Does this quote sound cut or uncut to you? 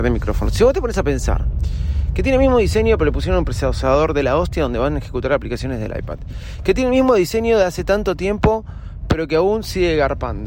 uncut